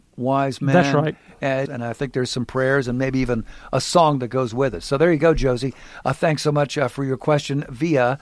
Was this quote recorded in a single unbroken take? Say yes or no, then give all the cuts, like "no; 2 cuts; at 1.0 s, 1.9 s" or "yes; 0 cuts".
no; 1 cut; at 1.7 s